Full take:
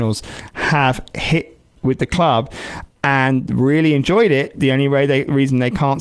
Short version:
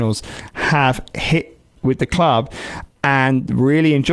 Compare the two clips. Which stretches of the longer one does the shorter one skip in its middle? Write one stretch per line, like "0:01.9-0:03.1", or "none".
none